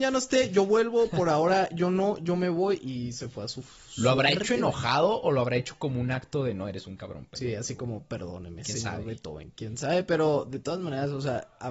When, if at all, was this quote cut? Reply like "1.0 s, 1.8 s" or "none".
none